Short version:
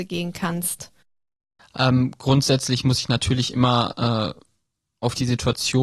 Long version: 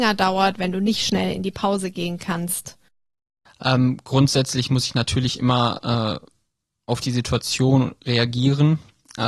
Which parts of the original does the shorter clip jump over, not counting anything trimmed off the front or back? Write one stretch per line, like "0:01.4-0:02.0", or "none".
none